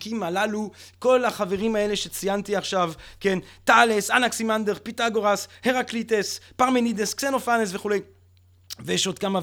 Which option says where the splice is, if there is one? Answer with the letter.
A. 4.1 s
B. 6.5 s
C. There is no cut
C